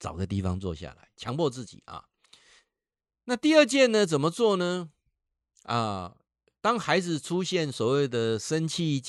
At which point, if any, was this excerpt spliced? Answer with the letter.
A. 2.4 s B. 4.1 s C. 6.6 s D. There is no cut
D